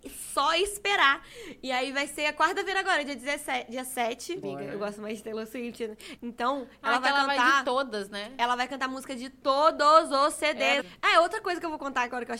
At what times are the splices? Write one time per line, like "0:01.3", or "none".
0:04.4
0:06.2
0:10.8